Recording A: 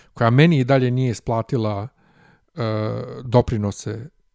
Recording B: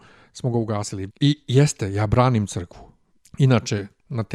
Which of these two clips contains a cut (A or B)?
B